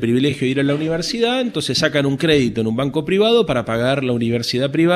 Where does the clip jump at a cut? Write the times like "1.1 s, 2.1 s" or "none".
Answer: none

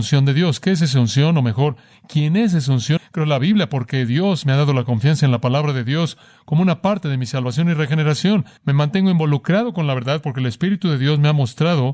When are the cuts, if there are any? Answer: 3.0 s, 8.6 s

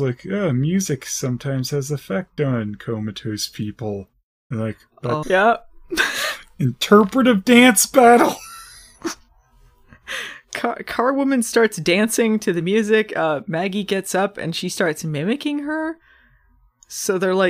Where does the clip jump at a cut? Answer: 5.2 s

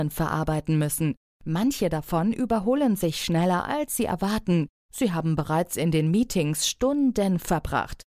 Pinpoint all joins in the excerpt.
4.7 s

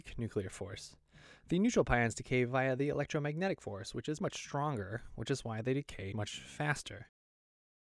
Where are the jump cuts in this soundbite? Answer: 4.2 s, 6.1 s

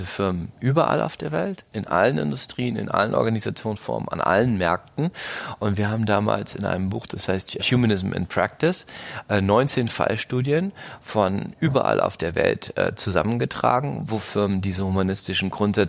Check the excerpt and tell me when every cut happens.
7.6 s

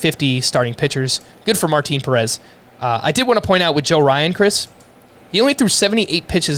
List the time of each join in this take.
none

